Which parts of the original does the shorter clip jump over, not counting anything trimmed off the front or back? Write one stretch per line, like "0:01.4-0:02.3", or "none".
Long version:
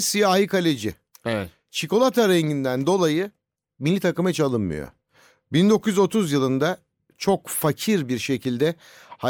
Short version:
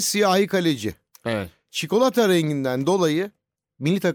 none